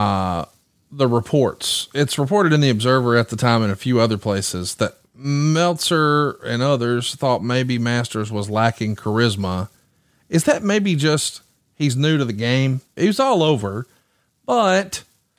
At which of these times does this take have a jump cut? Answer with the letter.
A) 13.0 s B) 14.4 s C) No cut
A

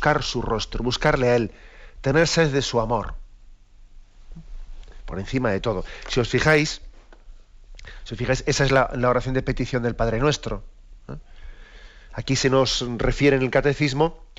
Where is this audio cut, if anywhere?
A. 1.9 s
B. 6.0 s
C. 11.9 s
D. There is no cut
D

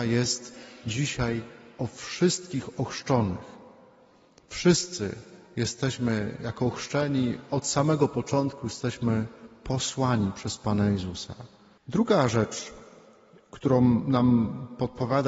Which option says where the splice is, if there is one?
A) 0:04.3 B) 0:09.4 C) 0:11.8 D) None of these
C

